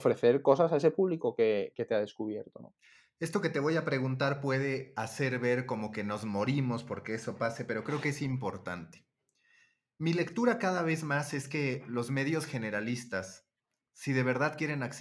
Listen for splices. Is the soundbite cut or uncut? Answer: uncut